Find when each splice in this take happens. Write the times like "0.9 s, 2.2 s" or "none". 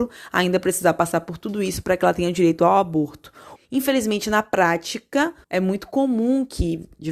3.6 s, 5.4 s